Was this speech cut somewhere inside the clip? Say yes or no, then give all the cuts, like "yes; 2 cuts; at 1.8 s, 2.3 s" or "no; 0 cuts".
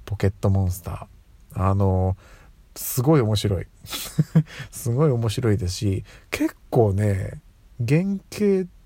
no; 0 cuts